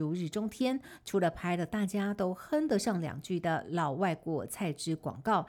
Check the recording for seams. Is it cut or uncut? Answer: uncut